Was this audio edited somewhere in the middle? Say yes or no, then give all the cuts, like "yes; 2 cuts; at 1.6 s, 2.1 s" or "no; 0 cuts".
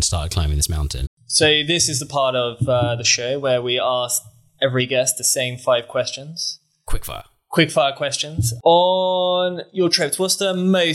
yes; 1 cut; at 1.1 s